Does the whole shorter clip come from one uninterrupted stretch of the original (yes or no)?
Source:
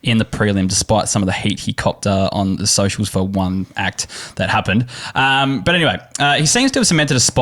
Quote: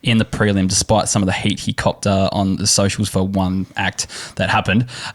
yes